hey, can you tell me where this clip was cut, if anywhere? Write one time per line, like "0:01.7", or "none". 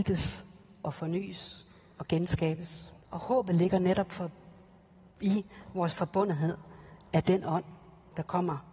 0:03.0